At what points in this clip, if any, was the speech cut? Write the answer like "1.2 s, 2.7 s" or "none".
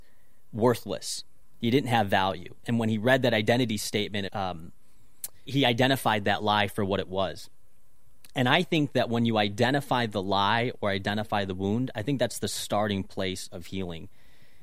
4.3 s, 5.5 s